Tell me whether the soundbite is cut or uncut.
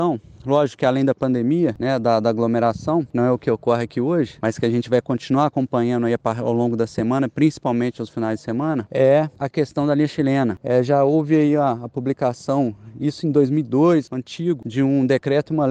uncut